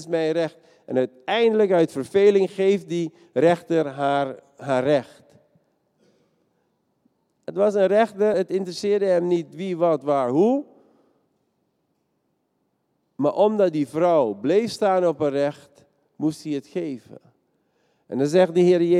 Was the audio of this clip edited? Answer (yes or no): no